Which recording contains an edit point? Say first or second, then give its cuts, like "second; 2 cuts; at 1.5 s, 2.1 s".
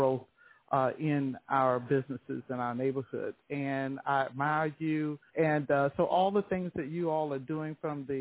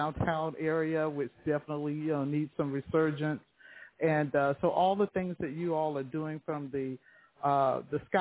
first; 2 cuts; at 3.4 s, 5.3 s